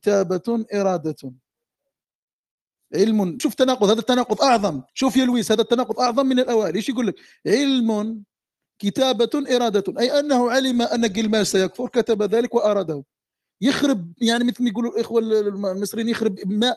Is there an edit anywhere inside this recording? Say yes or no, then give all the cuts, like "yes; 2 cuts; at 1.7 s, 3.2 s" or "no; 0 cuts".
yes; 2 cuts; at 3.4 s, 4.9 s